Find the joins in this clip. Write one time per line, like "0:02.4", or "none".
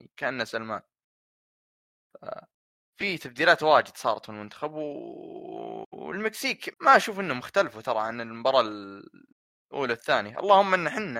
0:06.7